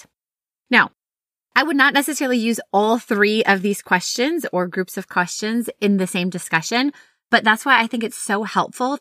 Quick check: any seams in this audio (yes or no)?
no